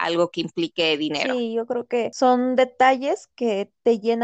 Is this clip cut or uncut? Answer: uncut